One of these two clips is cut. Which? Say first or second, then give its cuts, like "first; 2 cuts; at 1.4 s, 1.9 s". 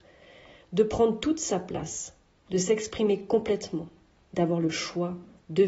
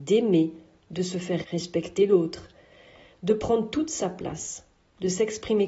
second; 1 cut; at 1.4 s